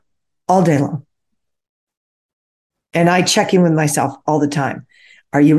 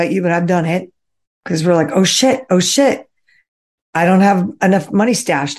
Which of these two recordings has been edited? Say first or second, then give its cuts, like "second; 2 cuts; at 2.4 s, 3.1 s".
second; 1 cut; at 1.2 s